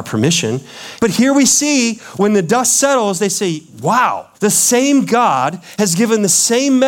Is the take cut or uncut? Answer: cut